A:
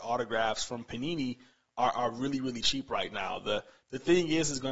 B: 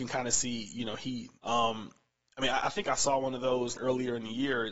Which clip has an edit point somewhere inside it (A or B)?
B